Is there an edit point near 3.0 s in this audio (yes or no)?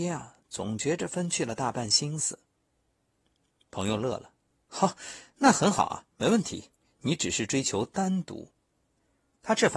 no